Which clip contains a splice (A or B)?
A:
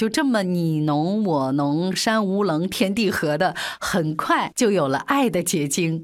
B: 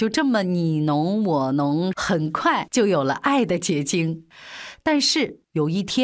B